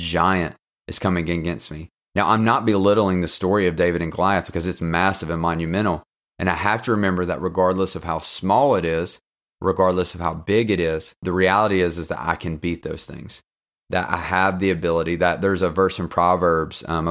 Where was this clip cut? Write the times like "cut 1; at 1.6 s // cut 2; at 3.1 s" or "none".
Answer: cut 1; at 6.2 s // cut 2; at 11.2 s